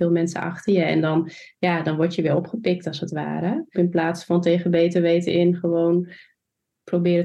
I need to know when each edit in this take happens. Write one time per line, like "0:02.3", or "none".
0:03.7